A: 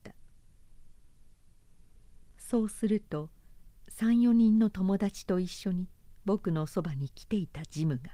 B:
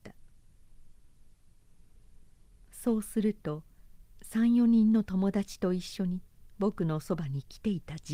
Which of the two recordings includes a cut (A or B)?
A